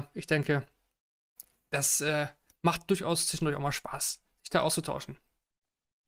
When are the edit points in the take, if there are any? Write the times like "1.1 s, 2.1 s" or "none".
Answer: none